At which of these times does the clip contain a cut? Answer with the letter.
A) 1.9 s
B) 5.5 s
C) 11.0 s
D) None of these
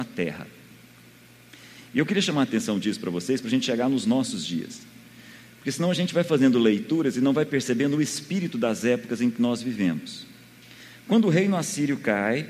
D